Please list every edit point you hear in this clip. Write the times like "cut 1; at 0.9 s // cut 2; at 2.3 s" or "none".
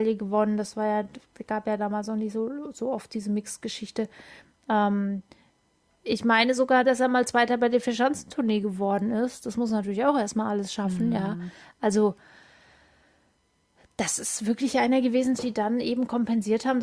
cut 1; at 15.4 s

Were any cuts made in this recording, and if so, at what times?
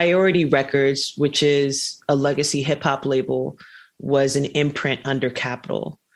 none

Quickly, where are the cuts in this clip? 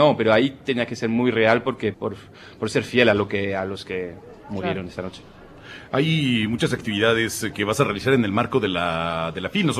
cut 1; at 1.9 s

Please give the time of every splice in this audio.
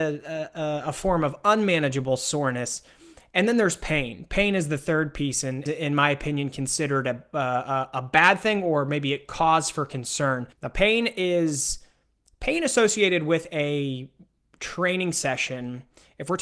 cut 1; at 5.7 s // cut 2; at 10.5 s

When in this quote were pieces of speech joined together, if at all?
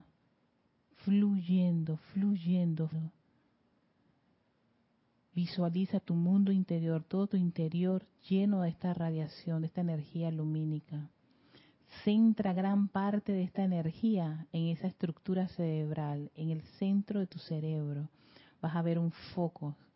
cut 1; at 2.9 s

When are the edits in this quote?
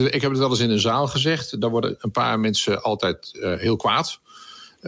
none

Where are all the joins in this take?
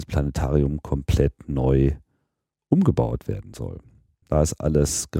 cut 1; at 4.2 s

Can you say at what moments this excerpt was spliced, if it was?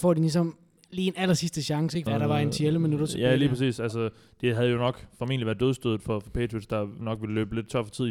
cut 1; at 2.1 s

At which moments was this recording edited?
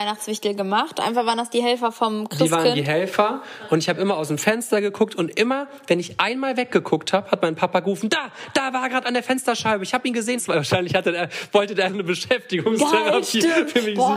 cut 1; at 10.4 s // cut 2; at 11.9 s

